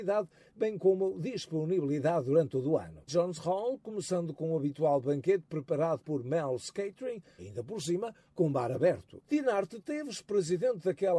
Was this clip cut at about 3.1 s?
yes; 2 cuts; at 3.1 s, 7.4 s

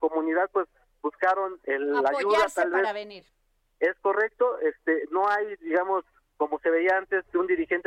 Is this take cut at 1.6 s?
yes; 1 cut; at 1.6 s

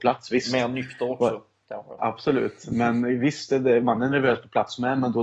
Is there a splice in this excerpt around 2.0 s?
yes; 1 cut; at 2.0 s

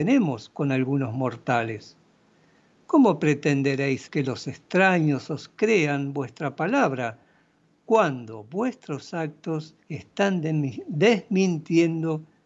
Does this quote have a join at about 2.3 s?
no; 2 cuts; at 4.1 s, 9.8 s

